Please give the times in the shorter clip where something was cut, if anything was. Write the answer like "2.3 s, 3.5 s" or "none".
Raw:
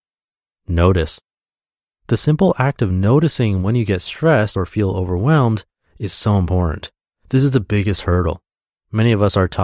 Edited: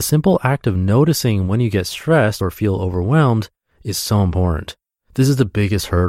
none